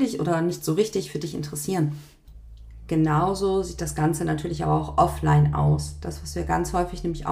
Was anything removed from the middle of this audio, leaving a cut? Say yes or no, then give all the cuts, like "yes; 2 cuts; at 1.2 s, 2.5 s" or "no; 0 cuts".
no; 0 cuts